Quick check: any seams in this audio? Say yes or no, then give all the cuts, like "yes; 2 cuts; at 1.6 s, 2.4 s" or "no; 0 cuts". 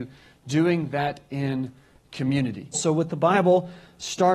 yes; 1 cut; at 2.7 s